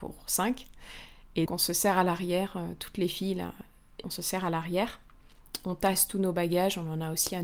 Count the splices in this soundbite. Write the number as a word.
two